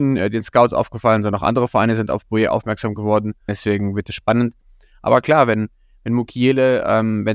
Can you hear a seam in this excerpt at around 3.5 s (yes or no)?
yes